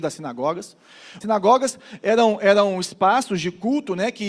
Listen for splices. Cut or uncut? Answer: cut